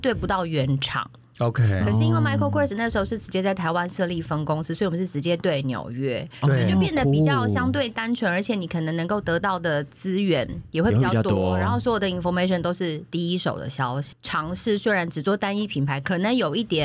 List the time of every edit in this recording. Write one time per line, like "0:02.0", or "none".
0:14.1